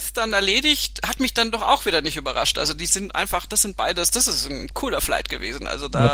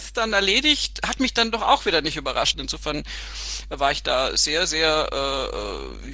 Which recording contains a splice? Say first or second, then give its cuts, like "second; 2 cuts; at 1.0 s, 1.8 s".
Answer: second; 1 cut; at 2.5 s